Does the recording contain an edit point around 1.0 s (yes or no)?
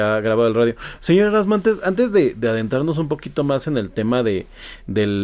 no